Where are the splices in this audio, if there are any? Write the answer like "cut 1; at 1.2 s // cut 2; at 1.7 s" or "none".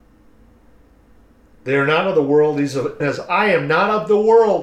cut 1; at 3.0 s